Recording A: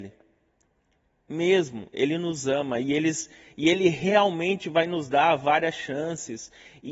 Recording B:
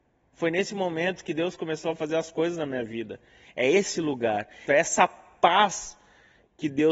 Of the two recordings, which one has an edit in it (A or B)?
B